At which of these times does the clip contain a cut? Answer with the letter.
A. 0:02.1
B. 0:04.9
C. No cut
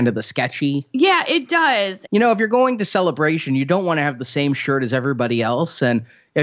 A